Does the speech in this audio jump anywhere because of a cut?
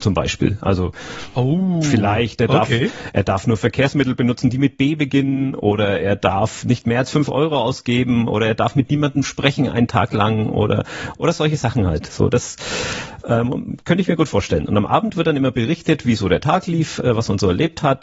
no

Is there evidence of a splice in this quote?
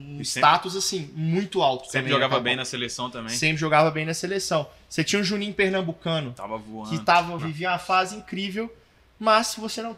yes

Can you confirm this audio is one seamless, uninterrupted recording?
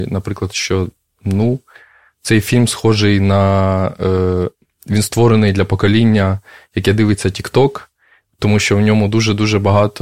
yes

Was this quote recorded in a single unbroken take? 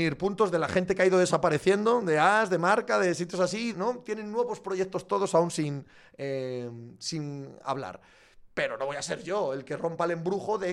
no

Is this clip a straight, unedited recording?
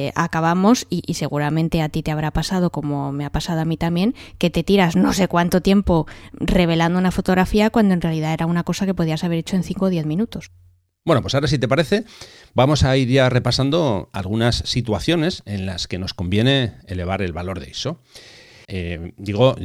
no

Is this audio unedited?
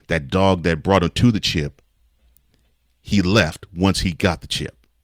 yes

